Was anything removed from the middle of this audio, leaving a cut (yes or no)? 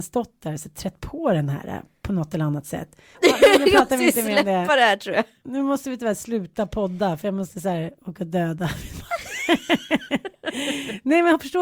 yes